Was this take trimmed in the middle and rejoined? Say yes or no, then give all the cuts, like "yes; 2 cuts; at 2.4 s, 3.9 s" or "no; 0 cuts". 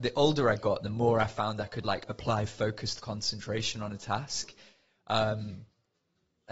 no; 0 cuts